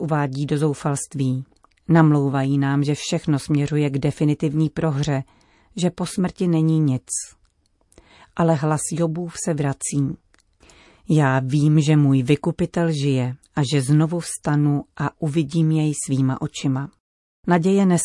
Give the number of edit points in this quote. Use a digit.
0